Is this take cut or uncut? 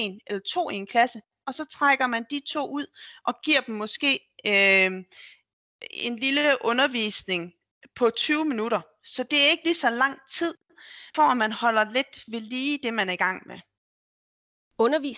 cut